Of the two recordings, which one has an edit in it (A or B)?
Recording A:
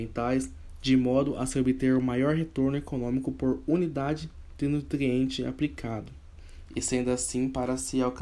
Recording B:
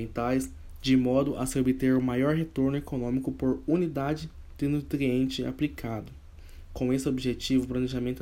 A